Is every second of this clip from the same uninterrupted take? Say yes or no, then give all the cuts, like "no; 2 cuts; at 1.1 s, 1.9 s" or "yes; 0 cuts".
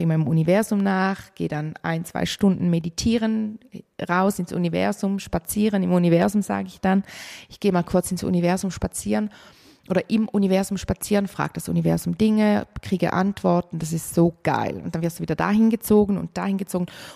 yes; 0 cuts